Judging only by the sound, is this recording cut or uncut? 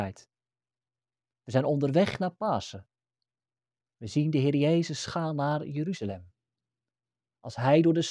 uncut